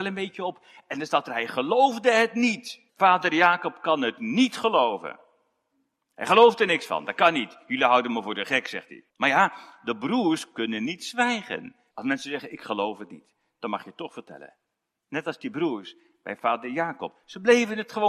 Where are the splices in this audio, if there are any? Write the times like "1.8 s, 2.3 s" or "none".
2.9 s, 9.1 s, 11.9 s